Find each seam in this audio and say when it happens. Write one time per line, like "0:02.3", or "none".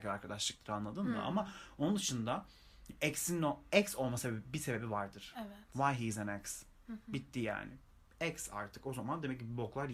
none